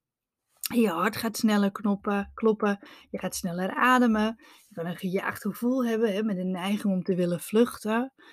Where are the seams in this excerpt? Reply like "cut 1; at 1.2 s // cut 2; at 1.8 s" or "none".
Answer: none

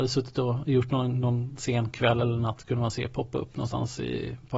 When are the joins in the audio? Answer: none

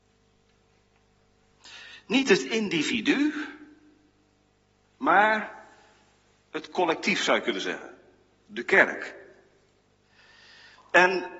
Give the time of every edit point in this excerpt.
none

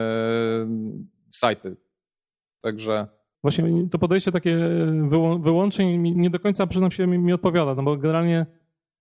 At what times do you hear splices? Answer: cut 1; at 3.3 s // cut 2; at 6.2 s

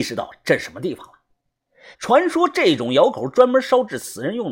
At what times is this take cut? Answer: cut 1; at 1.9 s

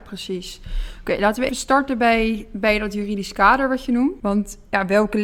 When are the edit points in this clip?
cut 1; at 1.5 s // cut 2; at 4.2 s

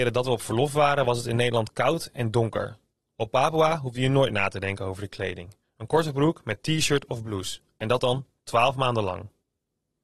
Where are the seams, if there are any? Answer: none

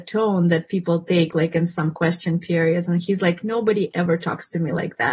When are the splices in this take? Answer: none

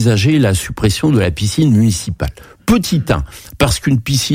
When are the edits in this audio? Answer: none

